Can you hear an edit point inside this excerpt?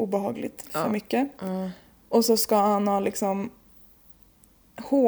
no; 0 cuts

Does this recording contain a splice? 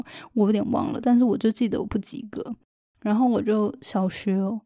no; 0 cuts

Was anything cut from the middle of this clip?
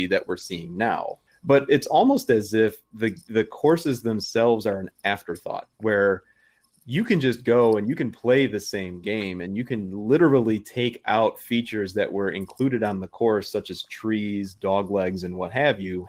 yes; 2 cuts; at 1.3 s, 5.7 s

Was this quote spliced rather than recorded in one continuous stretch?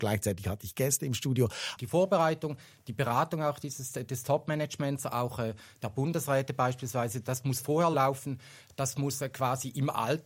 yes; 1 cut; at 1.8 s

